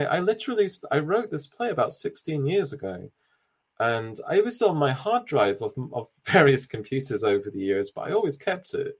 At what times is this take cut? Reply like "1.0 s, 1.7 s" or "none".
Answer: none